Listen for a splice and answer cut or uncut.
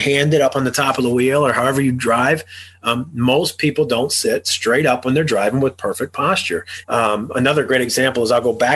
cut